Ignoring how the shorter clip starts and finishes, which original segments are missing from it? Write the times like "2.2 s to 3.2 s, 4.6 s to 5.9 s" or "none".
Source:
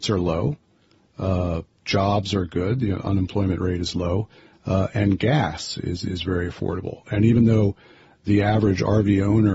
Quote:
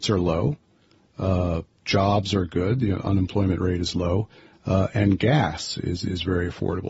none